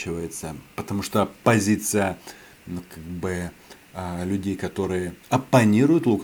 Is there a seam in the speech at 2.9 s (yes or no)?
no